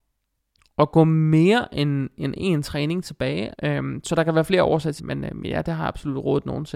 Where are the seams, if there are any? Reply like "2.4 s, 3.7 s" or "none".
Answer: 3.5 s, 5.0 s